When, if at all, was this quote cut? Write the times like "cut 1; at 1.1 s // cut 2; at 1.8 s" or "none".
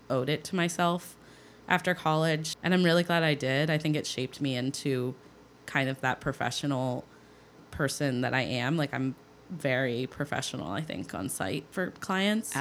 none